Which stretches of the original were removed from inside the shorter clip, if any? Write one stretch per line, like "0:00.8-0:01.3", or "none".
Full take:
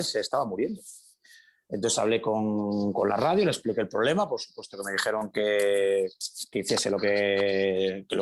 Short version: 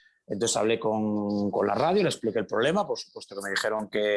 none